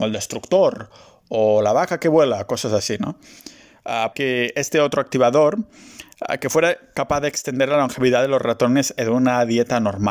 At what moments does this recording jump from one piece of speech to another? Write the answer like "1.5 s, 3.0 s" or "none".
4.1 s